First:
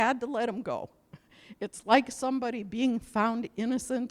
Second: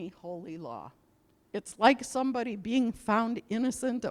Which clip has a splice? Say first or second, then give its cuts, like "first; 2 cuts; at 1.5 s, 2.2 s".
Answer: second; 1 cut; at 1.5 s